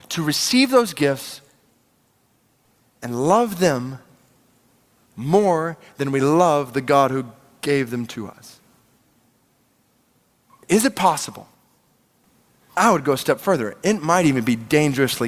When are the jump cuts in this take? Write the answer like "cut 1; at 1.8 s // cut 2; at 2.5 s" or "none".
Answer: none